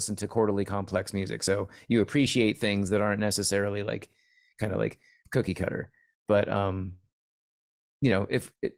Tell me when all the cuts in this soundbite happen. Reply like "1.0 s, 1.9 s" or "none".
none